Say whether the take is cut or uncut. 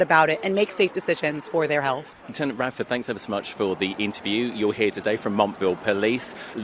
cut